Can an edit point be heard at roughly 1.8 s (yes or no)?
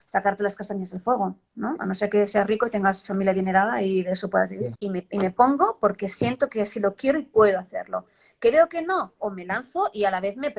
no